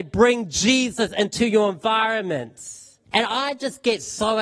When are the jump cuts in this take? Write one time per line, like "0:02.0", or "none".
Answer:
0:03.0